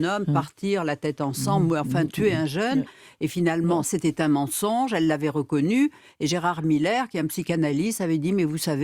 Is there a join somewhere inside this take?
yes; 1 cut; at 3.8 s

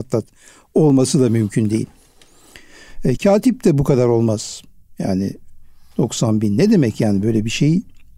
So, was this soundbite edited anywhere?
yes; 1 cut; at 3.2 s

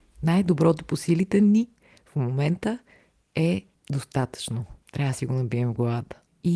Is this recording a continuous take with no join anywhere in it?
yes; 0 cuts

